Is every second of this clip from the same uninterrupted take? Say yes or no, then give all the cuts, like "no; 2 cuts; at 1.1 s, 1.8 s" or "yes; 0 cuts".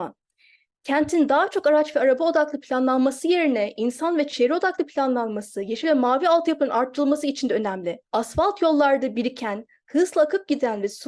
no; 1 cut; at 8.1 s